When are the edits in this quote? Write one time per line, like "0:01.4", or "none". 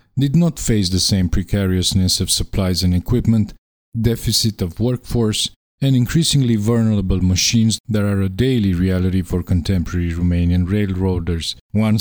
none